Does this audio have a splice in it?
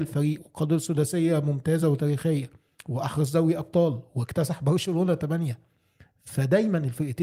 no; 0 cuts

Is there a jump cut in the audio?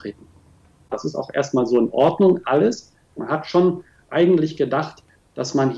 yes; 2 cuts; at 0.9 s, 3.2 s

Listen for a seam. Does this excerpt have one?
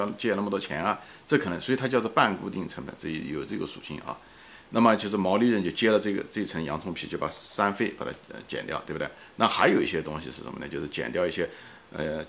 no; 0 cuts

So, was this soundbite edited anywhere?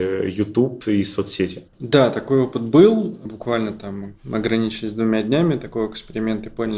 no; 0 cuts

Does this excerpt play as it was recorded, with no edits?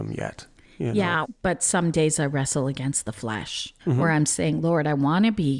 no; 2 cuts; at 1.2 s, 3.8 s

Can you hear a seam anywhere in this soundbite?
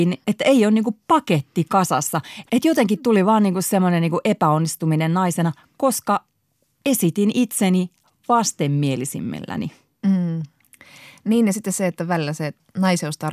no; 0 cuts

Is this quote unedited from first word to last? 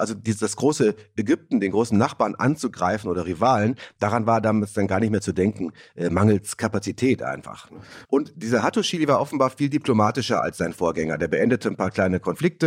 no; 1 cut; at 8.0 s

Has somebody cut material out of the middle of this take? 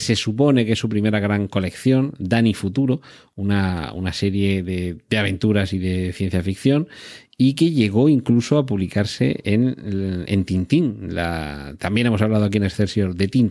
no; 0 cuts

